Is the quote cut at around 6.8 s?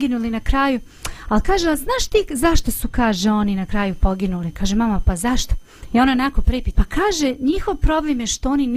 yes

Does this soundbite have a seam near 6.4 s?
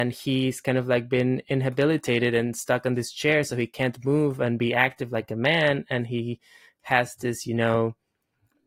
no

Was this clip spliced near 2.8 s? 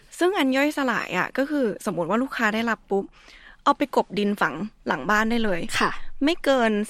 yes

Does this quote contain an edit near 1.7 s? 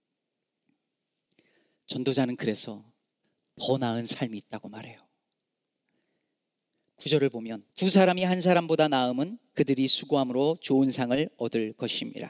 no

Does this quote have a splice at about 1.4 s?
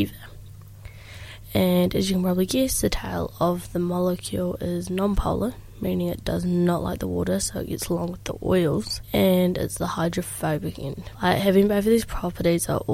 yes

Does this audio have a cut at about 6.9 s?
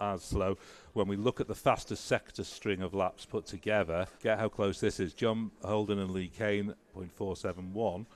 yes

